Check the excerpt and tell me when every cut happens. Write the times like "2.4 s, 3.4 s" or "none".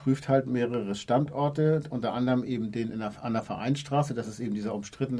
none